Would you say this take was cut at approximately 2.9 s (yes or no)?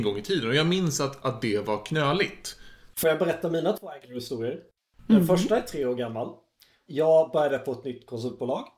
yes